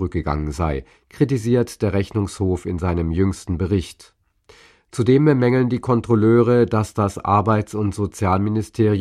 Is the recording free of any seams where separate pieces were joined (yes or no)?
yes